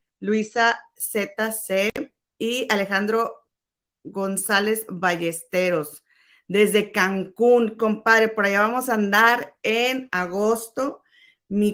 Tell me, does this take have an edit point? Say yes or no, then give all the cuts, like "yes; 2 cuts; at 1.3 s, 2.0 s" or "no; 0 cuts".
no; 0 cuts